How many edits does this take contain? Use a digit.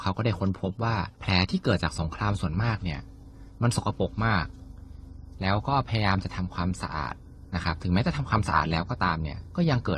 1